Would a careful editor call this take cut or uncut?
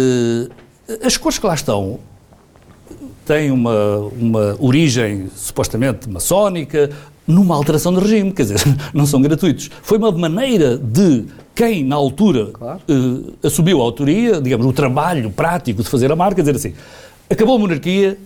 cut